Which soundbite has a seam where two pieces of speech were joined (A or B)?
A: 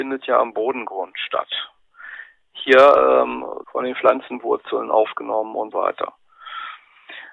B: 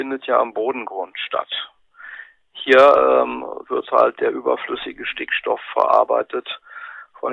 A